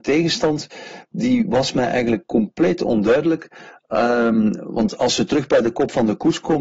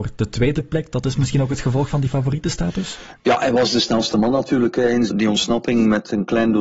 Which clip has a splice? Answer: second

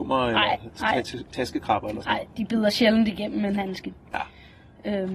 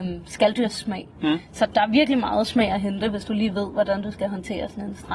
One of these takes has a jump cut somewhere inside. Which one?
second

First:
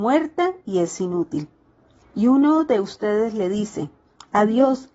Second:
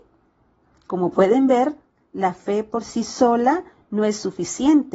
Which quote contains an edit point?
first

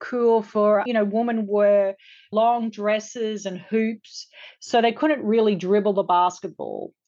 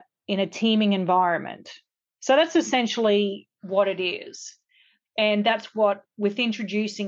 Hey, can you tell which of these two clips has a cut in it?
second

